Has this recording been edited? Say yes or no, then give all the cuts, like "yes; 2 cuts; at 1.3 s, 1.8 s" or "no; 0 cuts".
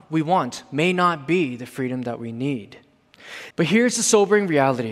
yes; 1 cut; at 3.5 s